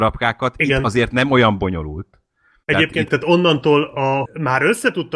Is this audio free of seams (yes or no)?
no